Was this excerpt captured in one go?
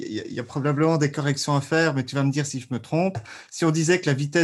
yes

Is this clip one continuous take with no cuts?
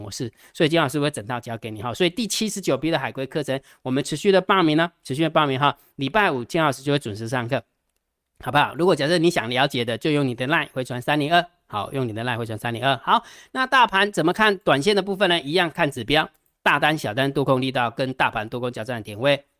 yes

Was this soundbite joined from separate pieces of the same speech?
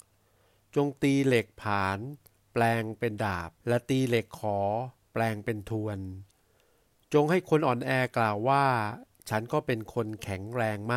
yes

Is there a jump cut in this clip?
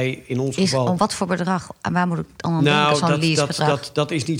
no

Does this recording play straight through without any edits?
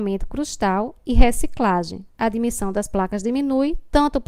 yes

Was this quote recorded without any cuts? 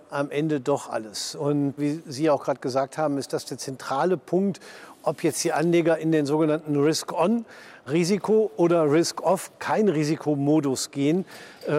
no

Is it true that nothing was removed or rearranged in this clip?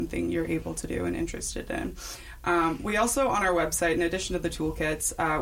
yes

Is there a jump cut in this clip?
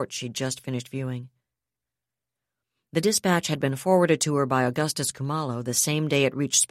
no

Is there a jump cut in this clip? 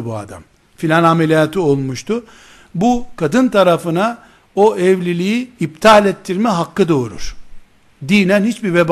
no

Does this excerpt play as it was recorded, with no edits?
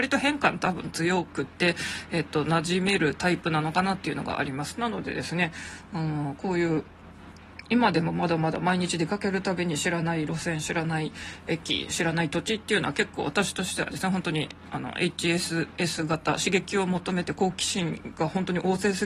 yes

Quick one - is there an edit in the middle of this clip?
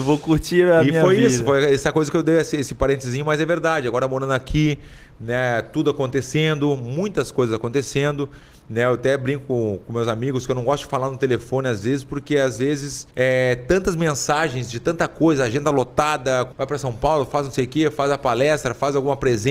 yes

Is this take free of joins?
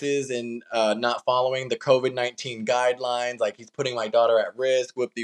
yes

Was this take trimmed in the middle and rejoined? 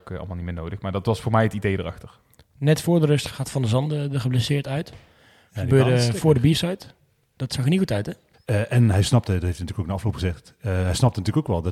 yes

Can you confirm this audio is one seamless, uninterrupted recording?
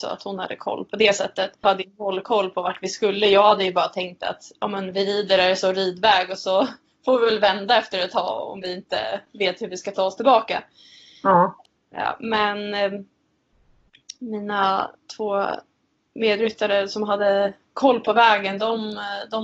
no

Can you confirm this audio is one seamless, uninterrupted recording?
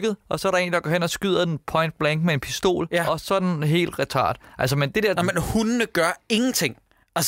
no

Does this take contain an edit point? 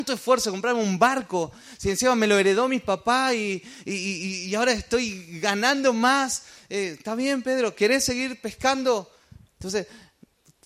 yes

